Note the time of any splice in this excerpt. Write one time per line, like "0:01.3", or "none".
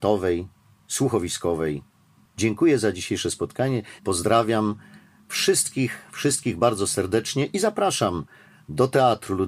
0:04.0